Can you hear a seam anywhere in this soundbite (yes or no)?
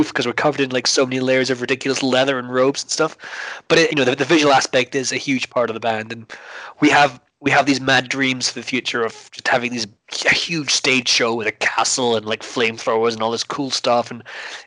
yes